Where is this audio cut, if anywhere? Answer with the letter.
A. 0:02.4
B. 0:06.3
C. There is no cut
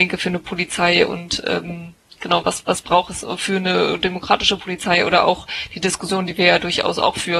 C